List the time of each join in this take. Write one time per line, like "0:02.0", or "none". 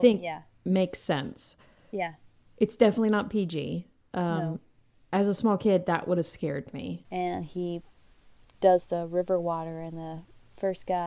0:07.0